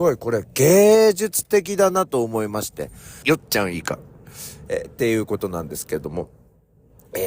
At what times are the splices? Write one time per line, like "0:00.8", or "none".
0:03.2